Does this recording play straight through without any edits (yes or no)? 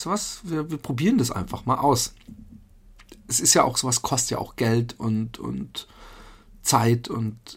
yes